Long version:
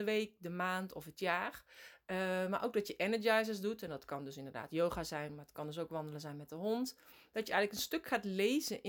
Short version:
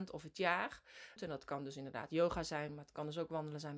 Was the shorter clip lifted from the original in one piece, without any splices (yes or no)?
no